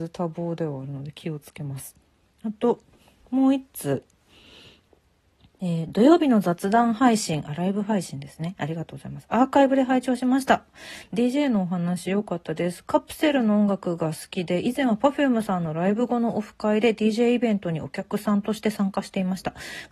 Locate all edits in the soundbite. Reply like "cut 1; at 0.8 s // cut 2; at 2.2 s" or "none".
none